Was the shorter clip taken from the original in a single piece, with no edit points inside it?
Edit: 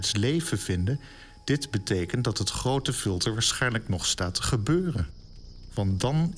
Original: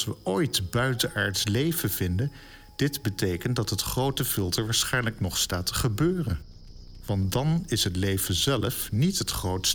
yes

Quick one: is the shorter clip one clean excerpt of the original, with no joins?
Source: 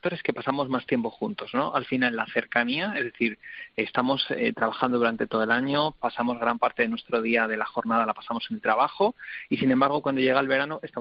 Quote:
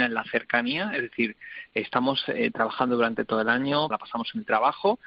no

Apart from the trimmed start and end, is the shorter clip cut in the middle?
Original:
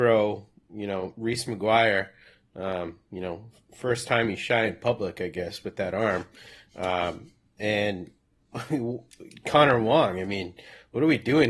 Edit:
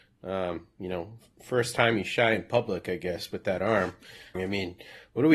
yes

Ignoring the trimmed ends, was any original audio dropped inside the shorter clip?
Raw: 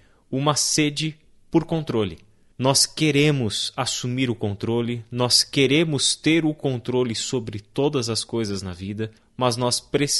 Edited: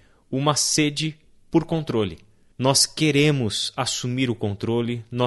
no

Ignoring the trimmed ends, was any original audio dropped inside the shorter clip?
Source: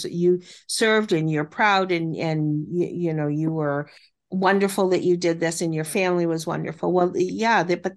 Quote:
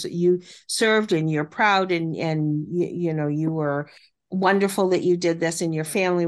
no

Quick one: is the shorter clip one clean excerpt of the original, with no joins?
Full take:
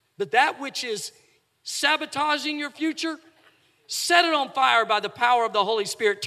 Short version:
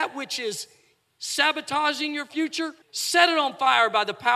no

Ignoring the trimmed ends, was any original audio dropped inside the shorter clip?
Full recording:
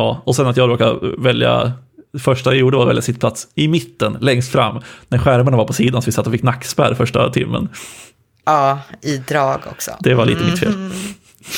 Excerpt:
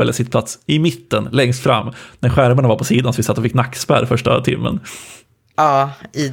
no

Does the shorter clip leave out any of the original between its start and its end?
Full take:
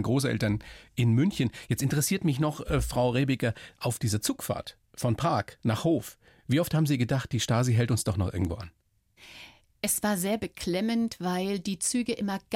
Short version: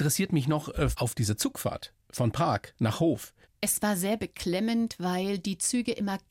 yes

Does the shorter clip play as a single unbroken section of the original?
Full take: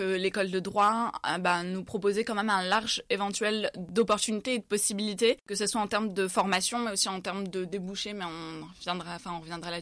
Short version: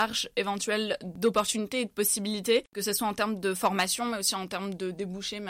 yes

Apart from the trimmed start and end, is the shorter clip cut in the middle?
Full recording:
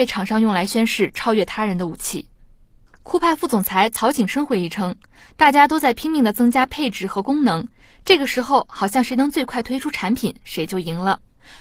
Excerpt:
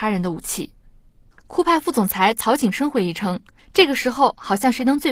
yes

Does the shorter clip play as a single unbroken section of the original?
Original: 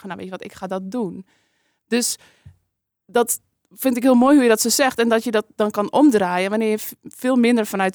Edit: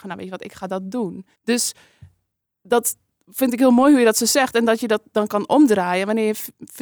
no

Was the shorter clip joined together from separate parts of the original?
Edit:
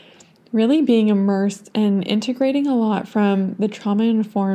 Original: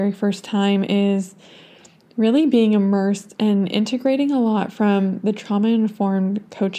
no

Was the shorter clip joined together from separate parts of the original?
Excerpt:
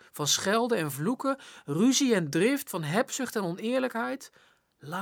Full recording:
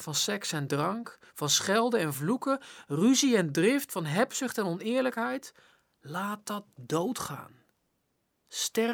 no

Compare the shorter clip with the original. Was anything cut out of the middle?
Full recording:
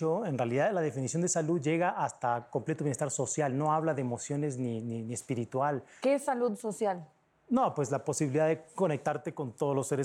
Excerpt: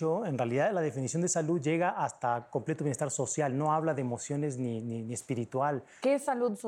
no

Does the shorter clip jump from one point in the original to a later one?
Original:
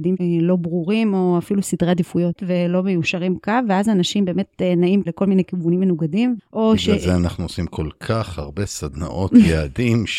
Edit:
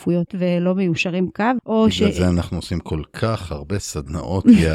yes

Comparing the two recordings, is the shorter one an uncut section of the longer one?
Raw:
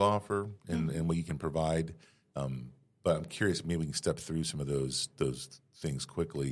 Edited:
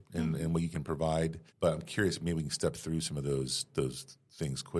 no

